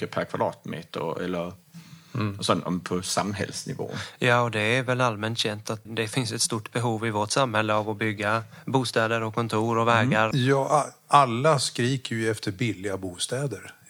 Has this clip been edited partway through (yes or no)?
yes